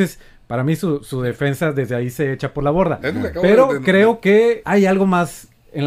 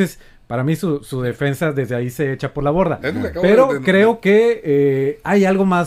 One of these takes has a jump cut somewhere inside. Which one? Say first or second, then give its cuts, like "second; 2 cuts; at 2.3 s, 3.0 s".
first; 1 cut; at 4.6 s